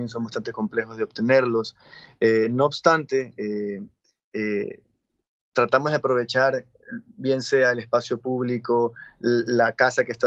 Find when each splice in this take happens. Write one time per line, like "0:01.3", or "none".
none